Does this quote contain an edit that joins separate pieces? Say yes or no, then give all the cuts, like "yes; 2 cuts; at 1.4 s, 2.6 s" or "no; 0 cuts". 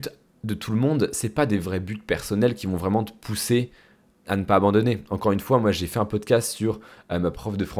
yes; 1 cut; at 4.2 s